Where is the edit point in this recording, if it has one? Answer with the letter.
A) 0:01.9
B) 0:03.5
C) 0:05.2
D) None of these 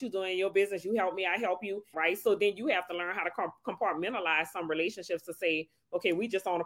A